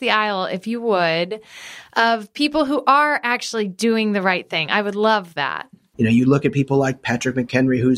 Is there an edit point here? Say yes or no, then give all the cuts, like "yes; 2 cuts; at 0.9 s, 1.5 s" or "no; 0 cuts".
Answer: no; 0 cuts